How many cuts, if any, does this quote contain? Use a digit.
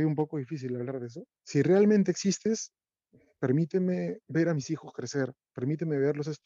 2